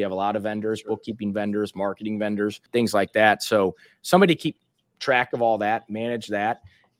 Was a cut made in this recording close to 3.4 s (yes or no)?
no